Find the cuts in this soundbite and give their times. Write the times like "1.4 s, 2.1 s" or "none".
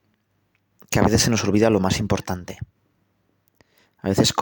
none